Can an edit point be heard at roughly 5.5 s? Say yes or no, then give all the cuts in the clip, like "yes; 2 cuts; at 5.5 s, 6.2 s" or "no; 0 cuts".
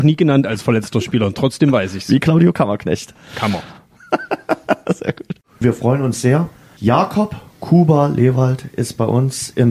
no; 0 cuts